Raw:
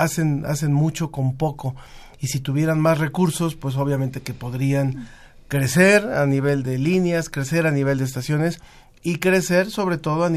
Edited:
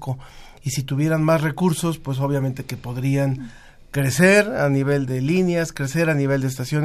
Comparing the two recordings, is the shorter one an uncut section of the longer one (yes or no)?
yes